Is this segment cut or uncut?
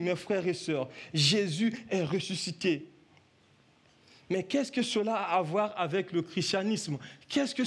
uncut